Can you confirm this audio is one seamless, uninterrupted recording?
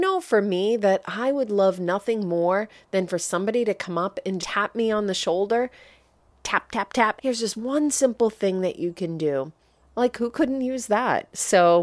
no; 3 cuts; at 4.4 s, 7.2 s, 9.8 s

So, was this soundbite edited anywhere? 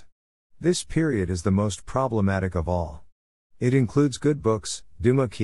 no; 0 cuts

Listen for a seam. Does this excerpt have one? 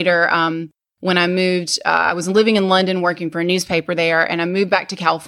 no; 0 cuts

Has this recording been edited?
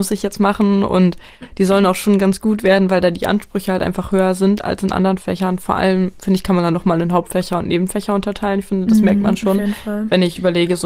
no; 0 cuts

